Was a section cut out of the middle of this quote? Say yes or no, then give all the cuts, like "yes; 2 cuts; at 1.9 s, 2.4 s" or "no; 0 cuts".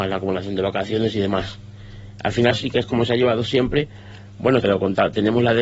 yes; 2 cuts; at 2.5 s, 4.6 s